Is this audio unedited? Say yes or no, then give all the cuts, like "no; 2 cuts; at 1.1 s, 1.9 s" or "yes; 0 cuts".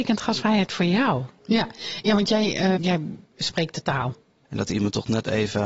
no; 3 cuts; at 1.4 s, 2.7 s, 4.4 s